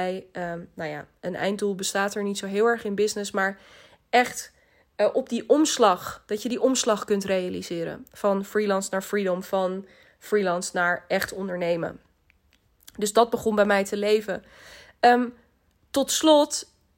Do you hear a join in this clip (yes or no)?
no